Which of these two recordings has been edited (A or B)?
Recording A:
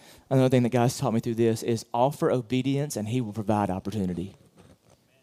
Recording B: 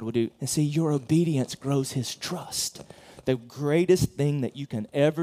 B